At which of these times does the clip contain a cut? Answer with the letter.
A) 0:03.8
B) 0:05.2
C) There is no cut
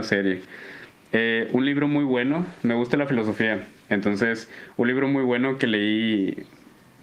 C